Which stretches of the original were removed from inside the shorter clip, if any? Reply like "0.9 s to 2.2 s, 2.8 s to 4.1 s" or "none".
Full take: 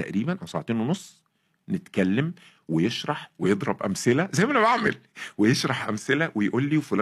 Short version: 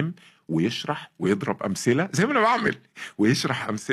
none